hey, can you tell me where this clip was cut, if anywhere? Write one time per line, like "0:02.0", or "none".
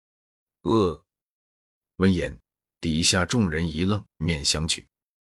0:04.2